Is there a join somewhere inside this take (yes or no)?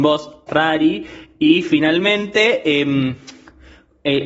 no